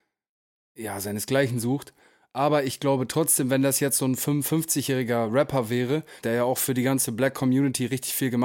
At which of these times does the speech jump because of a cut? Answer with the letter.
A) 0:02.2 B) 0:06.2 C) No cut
B